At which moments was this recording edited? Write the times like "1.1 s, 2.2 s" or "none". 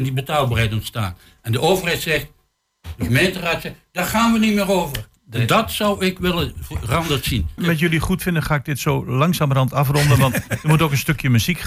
5.2 s, 7.6 s

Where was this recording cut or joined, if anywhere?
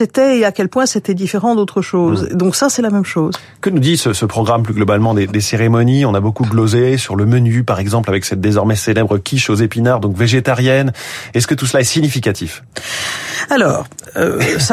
none

